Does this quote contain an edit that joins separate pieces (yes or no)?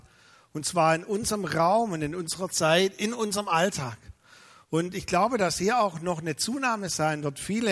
no